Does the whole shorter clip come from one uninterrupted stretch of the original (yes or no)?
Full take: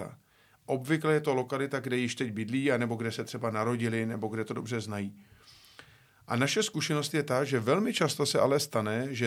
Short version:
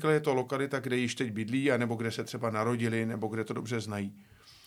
yes